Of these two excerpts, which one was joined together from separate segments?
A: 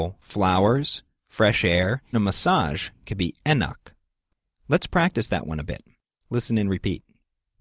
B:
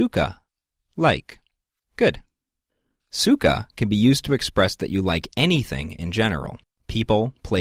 A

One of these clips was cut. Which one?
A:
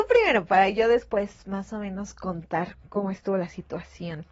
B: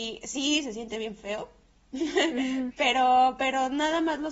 A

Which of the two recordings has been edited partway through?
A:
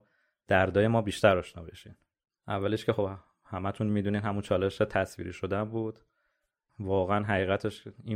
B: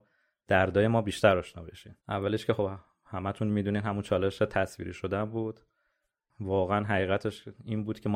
B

